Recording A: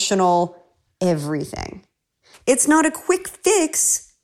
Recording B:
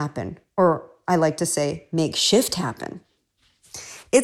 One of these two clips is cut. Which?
A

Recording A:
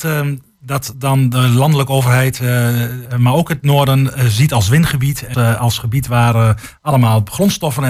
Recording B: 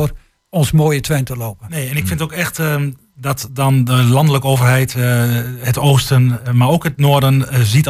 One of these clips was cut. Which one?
A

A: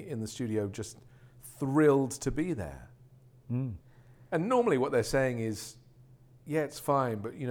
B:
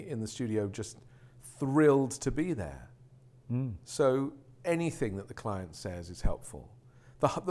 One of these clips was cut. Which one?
A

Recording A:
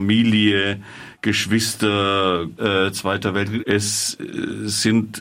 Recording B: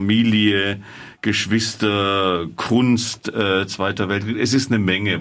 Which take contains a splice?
A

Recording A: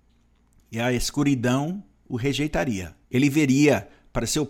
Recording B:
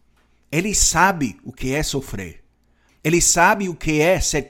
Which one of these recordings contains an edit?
A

